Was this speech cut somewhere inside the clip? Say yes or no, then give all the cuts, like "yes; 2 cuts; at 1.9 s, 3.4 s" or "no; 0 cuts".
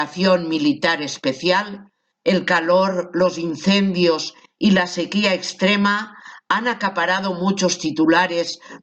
yes; 1 cut; at 2.1 s